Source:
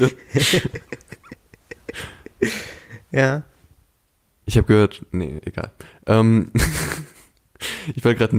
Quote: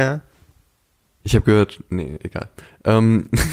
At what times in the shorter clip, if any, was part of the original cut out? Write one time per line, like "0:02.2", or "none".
none

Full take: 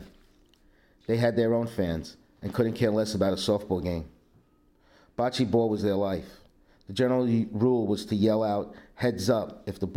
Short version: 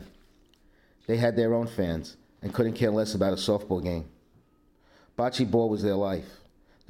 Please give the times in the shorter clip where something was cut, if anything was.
none

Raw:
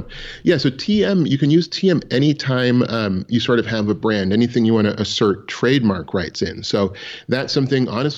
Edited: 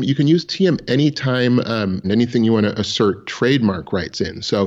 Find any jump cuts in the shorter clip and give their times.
0:02.0

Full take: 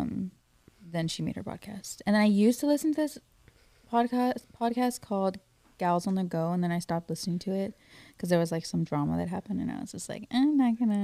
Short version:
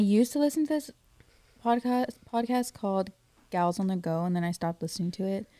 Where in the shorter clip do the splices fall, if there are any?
none

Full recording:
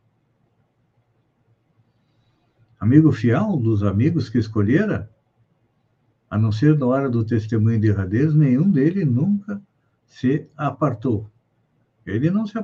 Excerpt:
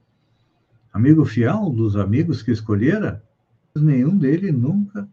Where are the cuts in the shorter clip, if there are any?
0:03.8

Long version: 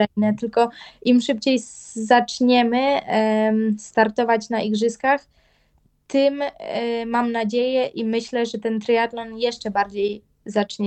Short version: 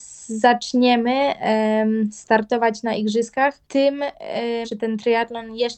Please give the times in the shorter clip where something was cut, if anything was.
0:03.6
0:04.6

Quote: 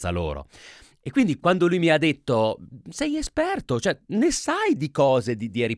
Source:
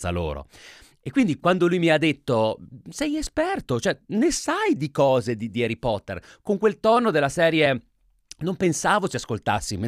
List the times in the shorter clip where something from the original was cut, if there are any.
none

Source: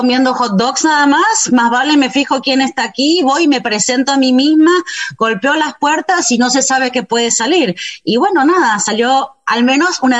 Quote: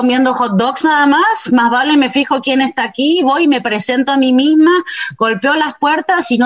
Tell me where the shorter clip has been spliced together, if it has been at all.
none

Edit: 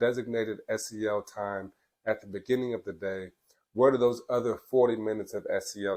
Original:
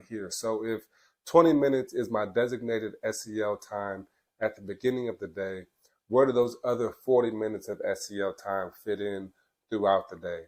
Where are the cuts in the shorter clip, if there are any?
none

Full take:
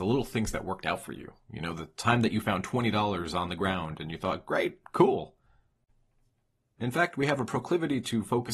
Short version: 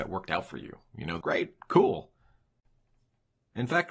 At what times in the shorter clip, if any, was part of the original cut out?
0:01.2

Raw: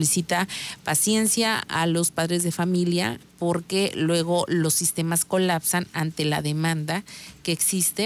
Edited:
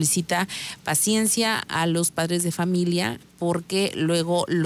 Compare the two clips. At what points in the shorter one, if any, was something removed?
none

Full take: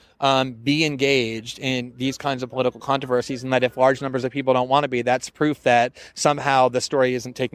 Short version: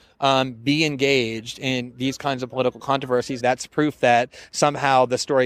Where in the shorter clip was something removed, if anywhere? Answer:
0:03.4

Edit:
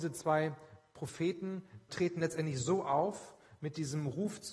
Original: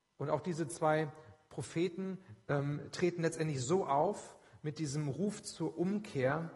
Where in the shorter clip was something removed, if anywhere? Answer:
0:01.9

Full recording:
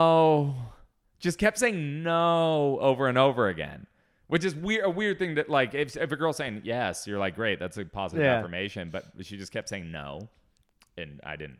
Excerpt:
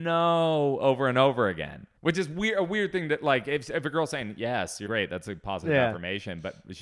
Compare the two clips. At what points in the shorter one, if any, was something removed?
0:02.0
0:04.9

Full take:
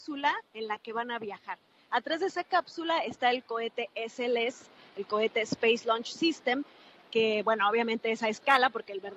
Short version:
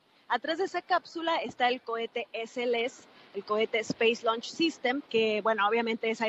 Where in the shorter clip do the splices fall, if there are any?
0:05.1

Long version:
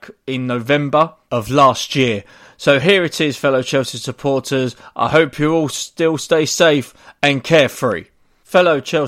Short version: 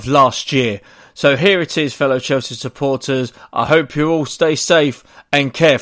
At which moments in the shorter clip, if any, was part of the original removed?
0:04.3

